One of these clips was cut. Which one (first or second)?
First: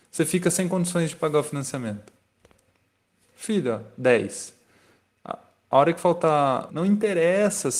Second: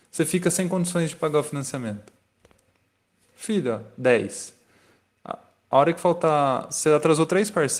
first